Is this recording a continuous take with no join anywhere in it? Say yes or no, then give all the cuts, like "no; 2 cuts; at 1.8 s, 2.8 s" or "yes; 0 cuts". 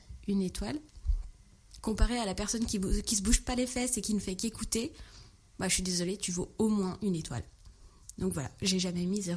no; 1 cut; at 1.8 s